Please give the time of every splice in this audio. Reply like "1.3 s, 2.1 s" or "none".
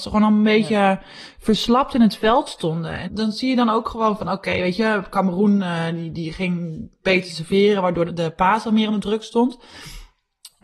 3.0 s, 8.0 s